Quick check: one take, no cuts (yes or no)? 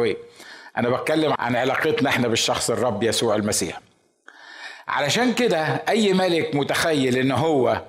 no